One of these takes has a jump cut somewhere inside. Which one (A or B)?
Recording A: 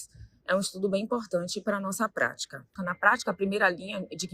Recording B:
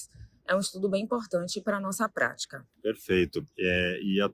A